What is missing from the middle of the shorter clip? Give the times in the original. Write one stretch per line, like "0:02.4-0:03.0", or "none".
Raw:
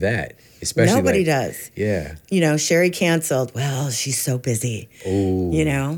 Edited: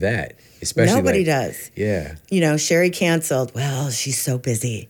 none